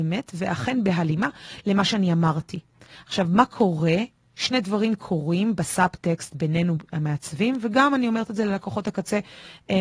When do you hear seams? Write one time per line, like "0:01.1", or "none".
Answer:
0:03.0